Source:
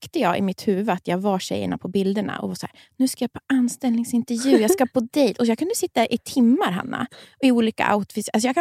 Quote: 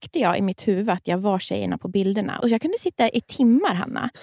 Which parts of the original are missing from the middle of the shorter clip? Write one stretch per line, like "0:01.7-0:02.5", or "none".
0:02.4-0:05.4